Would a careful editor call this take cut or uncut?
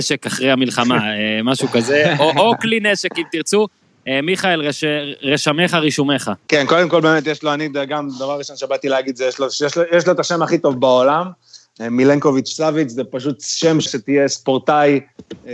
cut